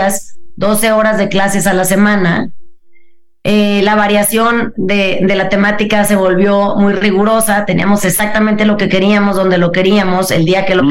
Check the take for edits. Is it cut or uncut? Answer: uncut